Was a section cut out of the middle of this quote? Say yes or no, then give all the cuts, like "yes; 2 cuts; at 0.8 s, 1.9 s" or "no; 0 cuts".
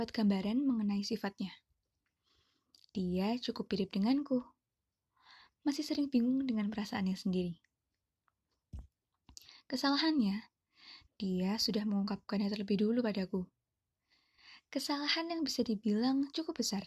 yes; 1 cut; at 11.1 s